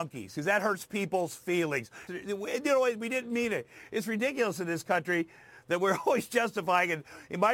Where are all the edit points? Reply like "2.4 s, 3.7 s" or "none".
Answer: 2.1 s